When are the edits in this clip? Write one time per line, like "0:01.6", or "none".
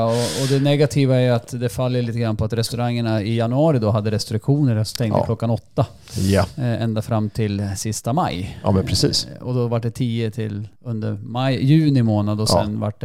0:10.8